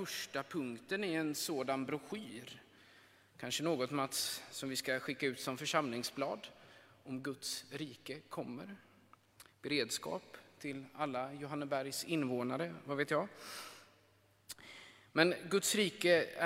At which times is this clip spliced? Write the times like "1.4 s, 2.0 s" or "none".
none